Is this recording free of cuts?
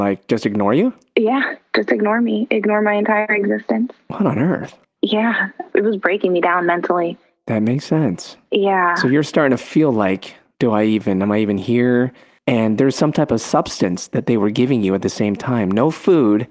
yes; 0 cuts

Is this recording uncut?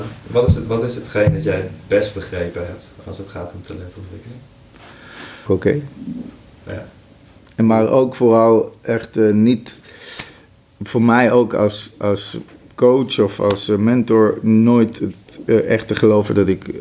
no; 1 cut; at 5.5 s

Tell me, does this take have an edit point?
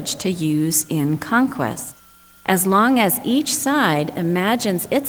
no; 0 cuts

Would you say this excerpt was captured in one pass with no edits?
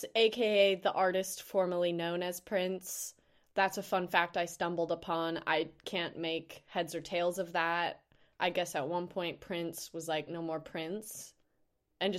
no; 1 cut; at 10.3 s

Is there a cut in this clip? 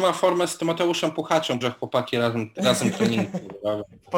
yes; 1 cut; at 1.6 s

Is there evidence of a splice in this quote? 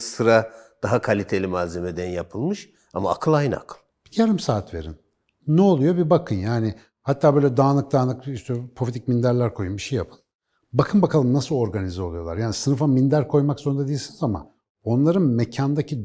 yes; 1 cut; at 3.9 s

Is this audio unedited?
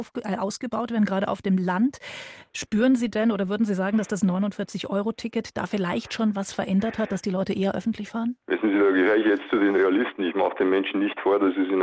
no; 1 cut; at 8.4 s

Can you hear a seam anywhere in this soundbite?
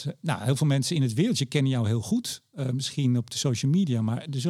no; 0 cuts

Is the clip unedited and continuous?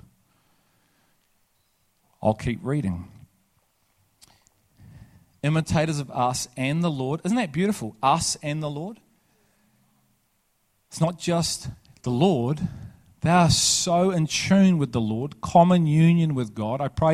yes; 0 cuts

